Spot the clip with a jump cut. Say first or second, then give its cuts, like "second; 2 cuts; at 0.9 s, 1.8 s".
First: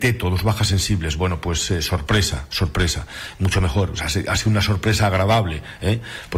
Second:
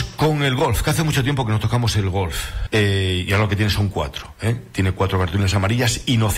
second; 1 cut; at 2.7 s